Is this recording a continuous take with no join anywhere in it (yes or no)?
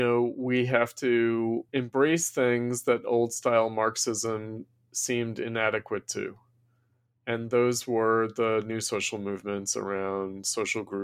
no